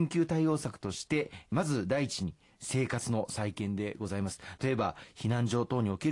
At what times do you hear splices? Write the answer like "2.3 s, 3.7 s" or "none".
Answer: 4.6 s